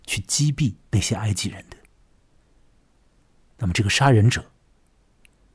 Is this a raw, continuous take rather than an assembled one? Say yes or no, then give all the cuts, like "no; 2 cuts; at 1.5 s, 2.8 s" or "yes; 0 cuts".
no; 1 cut; at 3.4 s